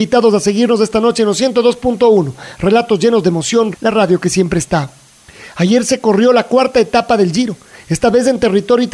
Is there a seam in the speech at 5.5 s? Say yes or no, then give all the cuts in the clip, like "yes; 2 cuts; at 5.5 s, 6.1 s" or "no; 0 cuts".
no; 1 cut; at 3.7 s